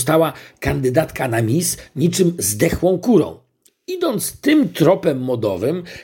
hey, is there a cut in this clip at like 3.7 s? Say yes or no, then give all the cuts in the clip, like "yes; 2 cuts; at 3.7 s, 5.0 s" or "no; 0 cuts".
yes; 1 cut; at 3.7 s